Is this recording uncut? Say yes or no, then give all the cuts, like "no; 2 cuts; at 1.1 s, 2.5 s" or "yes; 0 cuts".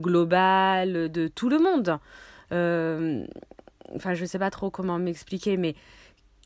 yes; 0 cuts